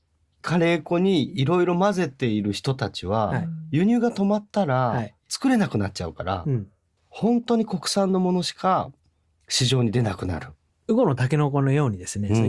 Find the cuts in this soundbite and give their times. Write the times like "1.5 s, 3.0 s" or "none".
10.7 s